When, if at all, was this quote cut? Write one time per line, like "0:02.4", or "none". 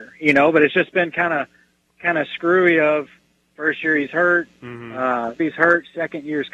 0:05.4